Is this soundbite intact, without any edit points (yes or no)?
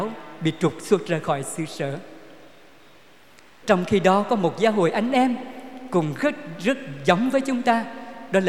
no